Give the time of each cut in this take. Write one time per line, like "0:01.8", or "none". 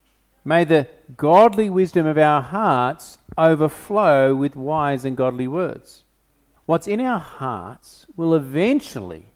0:06.6